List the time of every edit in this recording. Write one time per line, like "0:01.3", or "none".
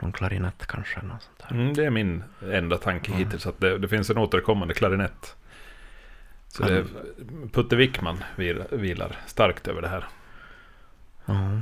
none